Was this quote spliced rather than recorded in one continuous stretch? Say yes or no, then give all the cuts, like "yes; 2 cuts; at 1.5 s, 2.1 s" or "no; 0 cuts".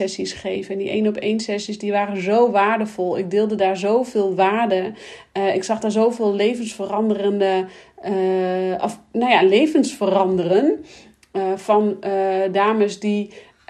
no; 0 cuts